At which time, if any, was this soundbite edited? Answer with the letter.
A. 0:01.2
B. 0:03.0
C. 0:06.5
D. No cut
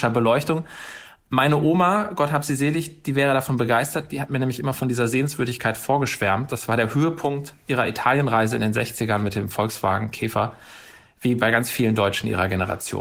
D